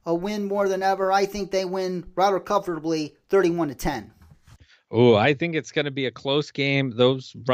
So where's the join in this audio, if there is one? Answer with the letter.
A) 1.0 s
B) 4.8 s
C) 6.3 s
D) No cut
D